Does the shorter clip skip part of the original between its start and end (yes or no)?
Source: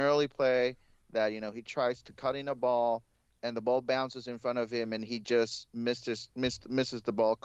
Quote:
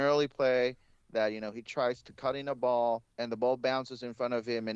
yes